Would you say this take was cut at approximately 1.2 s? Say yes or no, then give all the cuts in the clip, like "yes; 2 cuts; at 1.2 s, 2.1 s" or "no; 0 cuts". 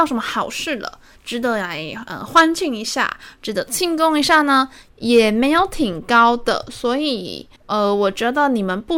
no; 2 cuts; at 4.9 s, 7.6 s